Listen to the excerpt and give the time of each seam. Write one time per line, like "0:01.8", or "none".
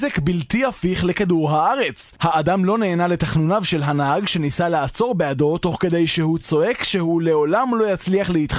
0:02.2